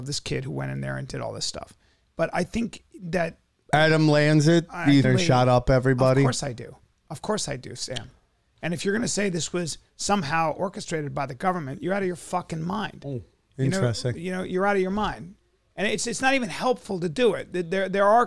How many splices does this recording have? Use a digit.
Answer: 1